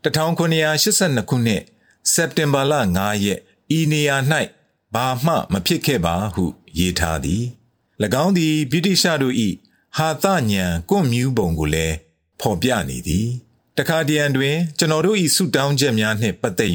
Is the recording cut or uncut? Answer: uncut